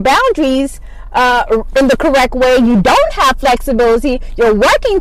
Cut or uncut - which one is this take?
uncut